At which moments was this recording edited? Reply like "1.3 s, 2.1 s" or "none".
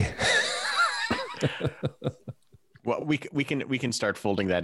none